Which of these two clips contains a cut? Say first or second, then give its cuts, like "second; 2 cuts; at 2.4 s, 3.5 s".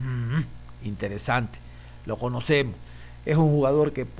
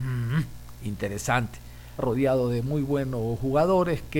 second; 1 cut; at 2.0 s